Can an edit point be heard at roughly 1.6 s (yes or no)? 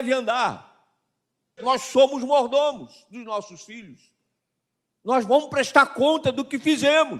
yes